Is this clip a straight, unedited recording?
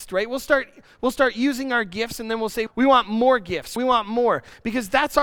no; 2 cuts; at 2.7 s, 3.8 s

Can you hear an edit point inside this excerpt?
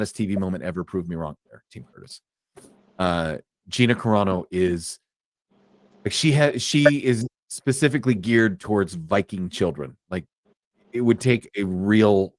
yes; 1 cut; at 1.4 s

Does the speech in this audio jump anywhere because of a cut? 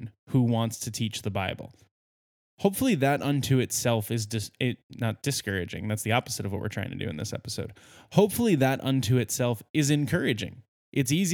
no; 0 cuts

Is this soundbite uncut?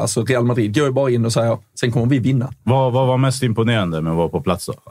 no; 1 cut; at 1.7 s

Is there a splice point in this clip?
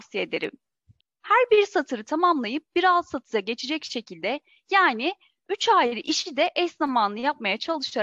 yes; 1 cut; at 1.0 s

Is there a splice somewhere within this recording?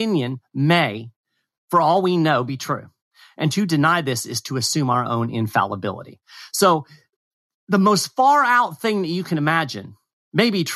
no; 0 cuts

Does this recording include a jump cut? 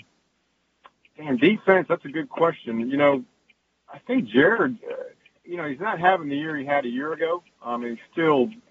yes; 1 cut; at 5.4 s

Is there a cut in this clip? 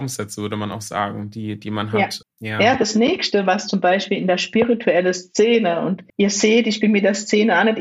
yes; 2 cuts; at 2.2 s, 6.1 s

